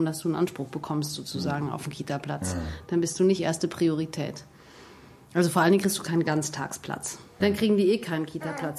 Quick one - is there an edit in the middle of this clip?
yes; 1 cut; at 7.4 s

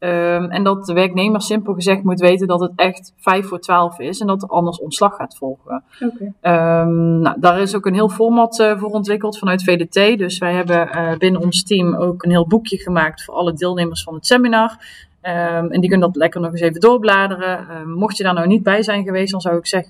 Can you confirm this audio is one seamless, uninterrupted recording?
no; 1 cut; at 12.2 s

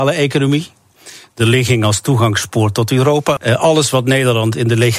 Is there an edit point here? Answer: yes; 1 cut; at 3.4 s

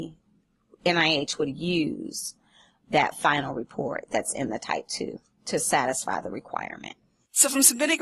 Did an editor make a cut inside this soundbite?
no; 0 cuts

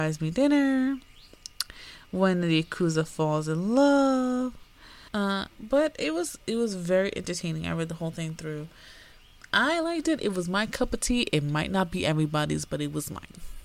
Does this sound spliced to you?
yes; 1 cut; at 5.1 s

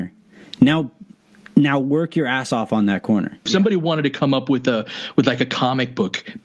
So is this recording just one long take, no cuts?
no; 1 cut; at 3.5 s

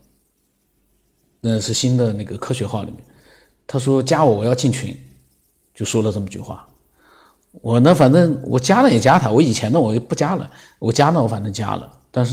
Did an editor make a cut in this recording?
no; 0 cuts

